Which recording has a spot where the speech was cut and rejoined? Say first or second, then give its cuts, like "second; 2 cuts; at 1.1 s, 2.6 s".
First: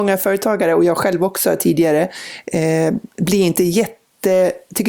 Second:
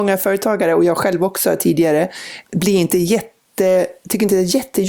second; 1 cut; at 2.4 s